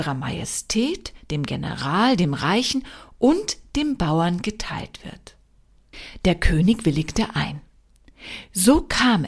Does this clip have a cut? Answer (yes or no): no